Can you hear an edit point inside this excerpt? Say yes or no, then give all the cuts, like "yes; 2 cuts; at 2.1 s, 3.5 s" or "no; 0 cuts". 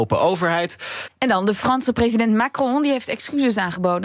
yes; 1 cut; at 1.1 s